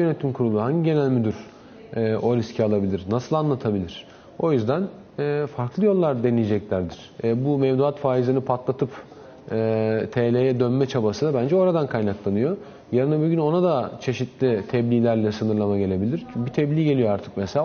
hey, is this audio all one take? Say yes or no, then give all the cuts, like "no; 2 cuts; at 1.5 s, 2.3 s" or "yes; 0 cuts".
no; 1 cut; at 7.1 s